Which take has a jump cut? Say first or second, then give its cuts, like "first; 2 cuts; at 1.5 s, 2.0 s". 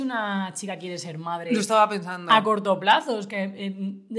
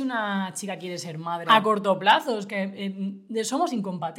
second; 1 cut; at 1.4 s